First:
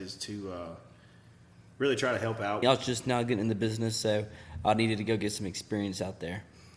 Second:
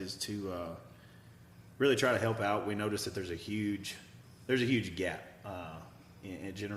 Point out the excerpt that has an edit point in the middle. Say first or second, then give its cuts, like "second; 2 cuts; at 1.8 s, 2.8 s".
first; 1 cut; at 2.6 s